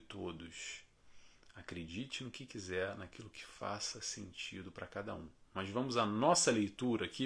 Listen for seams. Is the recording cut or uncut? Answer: uncut